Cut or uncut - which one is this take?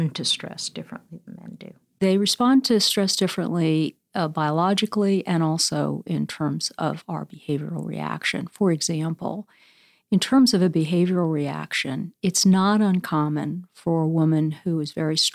uncut